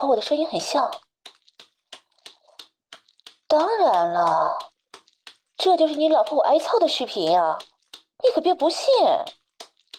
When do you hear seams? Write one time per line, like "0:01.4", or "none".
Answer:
none